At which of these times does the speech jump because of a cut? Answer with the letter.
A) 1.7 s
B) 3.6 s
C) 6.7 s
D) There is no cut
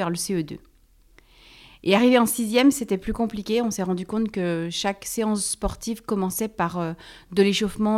D